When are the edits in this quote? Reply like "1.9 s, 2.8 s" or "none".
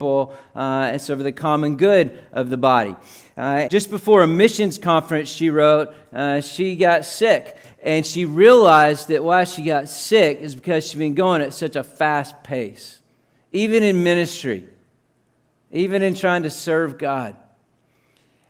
3.7 s, 7.6 s